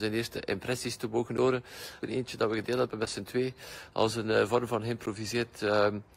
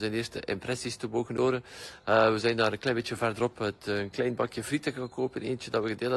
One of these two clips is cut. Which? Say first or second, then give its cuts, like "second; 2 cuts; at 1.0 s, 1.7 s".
first; 1 cut; at 2.0 s